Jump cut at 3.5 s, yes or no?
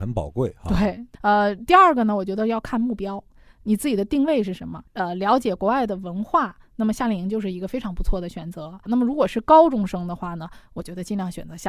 no